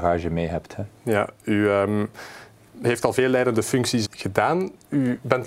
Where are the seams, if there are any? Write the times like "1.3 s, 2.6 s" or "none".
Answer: 4.0 s